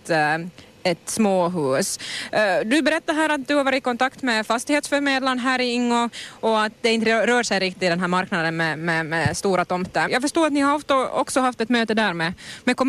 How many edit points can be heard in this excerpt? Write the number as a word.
one